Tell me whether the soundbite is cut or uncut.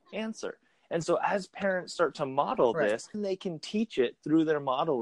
cut